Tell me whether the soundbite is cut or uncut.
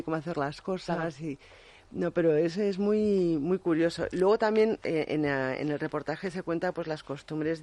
uncut